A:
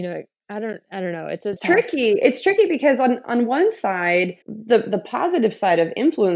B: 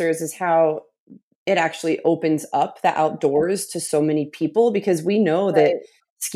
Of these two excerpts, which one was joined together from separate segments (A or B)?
A